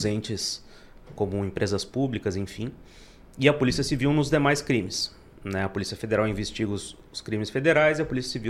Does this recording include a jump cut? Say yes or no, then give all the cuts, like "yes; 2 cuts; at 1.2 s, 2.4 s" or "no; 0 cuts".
no; 0 cuts